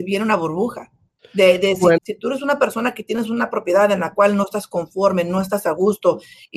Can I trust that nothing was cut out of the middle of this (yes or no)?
no